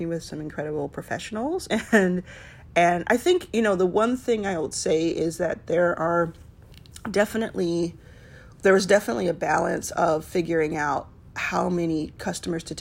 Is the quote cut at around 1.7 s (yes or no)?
no